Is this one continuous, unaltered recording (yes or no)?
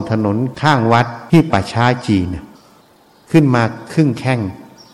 no